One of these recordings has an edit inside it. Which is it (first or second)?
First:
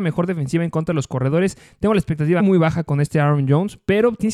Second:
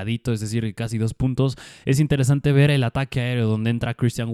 first